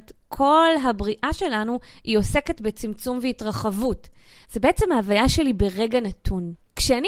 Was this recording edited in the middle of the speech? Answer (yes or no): yes